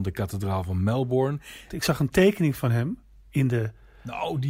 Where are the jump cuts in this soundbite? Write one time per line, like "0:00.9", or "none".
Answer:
0:01.7